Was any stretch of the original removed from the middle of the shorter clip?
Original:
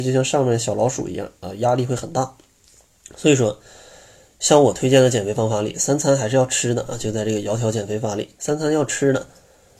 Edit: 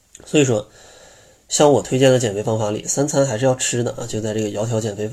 no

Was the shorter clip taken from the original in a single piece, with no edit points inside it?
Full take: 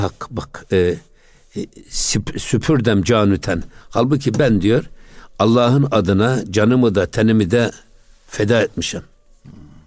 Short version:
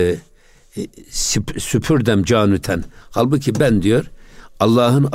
yes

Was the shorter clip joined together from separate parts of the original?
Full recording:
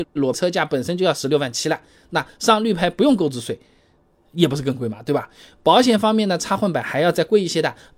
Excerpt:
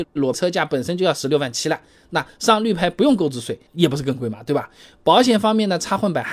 yes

